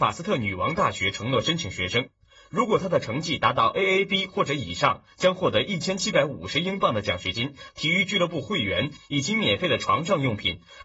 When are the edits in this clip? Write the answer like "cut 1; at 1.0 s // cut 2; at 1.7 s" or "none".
cut 1; at 7.7 s